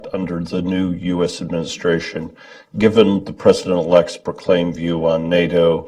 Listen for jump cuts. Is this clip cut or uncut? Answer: uncut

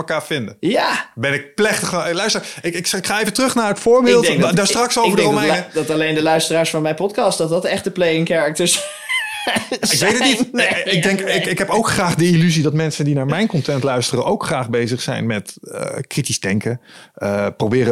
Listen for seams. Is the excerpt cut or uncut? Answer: uncut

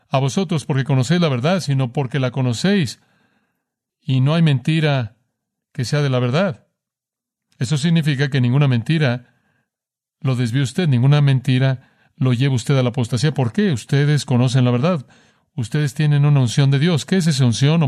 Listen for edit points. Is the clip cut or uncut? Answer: uncut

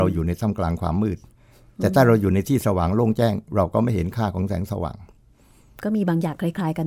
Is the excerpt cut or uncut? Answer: uncut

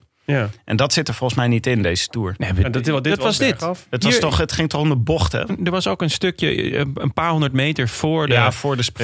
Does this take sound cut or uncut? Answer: cut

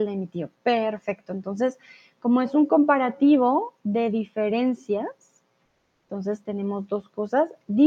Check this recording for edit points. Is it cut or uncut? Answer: uncut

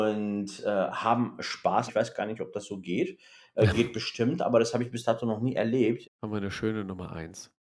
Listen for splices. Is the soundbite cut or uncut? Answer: cut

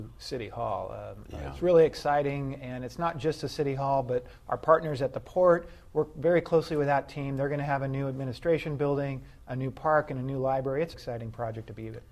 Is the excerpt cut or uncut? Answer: cut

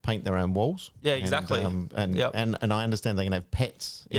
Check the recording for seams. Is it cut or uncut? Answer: uncut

